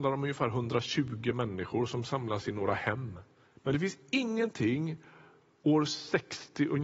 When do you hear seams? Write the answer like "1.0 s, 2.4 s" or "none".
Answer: 3.5 s